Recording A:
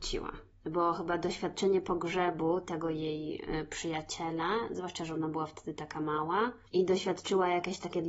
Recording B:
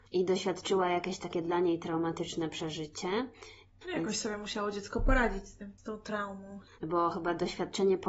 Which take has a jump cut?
B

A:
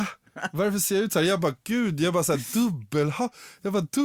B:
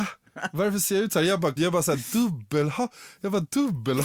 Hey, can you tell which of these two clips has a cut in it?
B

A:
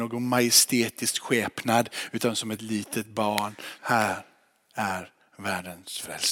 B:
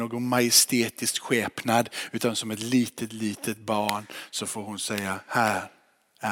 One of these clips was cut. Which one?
A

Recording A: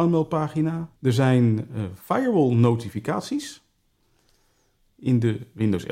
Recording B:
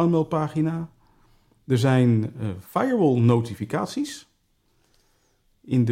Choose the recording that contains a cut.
A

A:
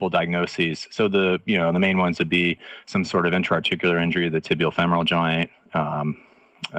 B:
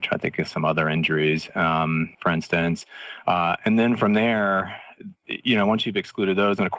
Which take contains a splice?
B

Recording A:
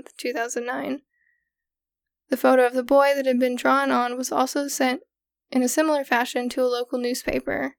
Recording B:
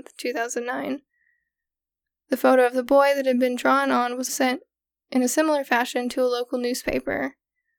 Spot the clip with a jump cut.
B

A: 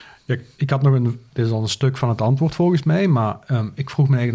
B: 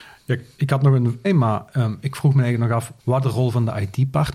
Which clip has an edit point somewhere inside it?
B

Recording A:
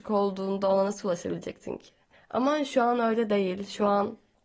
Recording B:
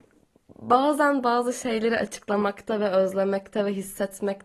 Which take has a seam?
A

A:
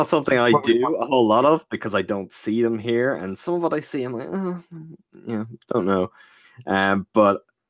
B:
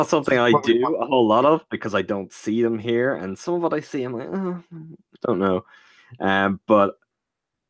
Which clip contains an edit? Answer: B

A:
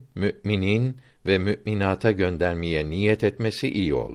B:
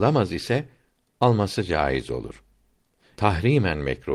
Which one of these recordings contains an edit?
B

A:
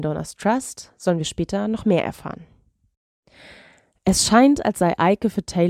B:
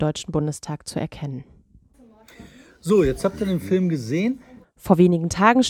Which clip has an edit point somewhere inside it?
B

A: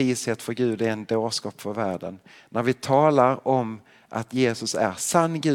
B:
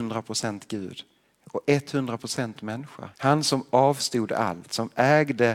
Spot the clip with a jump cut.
B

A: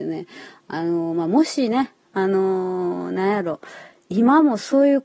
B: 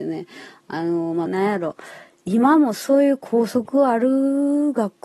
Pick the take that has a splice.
B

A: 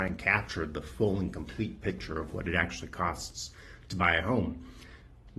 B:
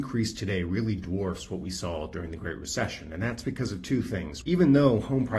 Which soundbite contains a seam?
B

